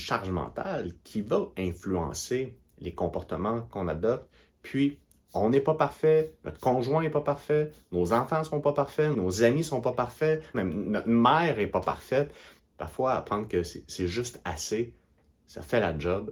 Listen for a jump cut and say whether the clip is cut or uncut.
cut